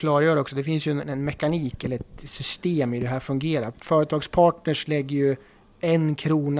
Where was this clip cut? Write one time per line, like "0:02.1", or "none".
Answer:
0:01.0